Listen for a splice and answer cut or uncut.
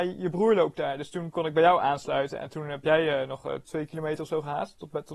cut